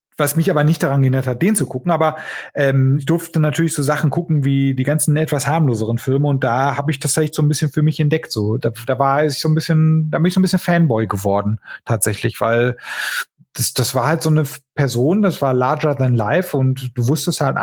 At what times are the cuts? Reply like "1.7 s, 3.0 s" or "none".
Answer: 8.6 s